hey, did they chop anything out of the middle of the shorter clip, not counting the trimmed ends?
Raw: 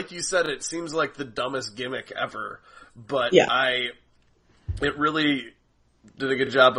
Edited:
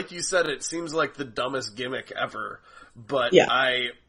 no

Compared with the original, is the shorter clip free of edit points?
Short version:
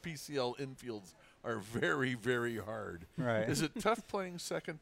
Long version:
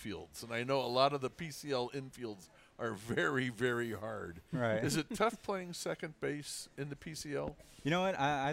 yes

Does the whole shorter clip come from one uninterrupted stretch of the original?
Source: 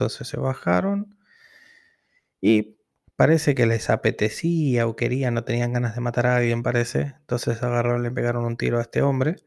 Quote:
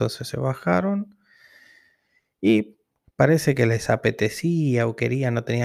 yes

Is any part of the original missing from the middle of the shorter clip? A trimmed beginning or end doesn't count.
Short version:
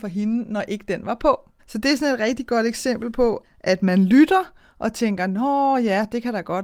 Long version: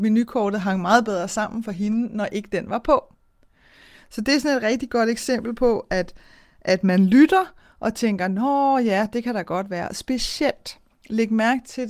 yes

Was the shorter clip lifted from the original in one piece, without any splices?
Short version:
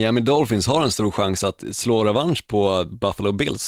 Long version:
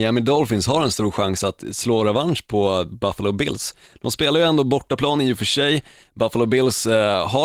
yes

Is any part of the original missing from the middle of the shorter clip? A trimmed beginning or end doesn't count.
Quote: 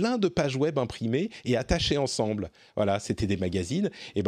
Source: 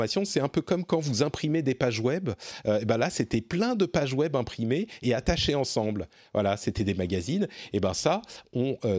no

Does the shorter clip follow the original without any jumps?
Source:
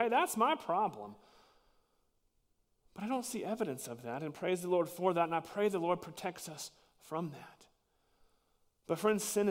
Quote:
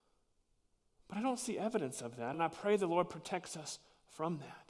no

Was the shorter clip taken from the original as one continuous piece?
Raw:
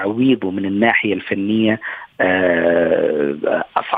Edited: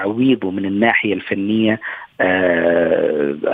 yes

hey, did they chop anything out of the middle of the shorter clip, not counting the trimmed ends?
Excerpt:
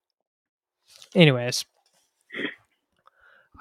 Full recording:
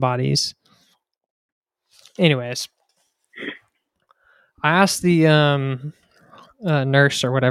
no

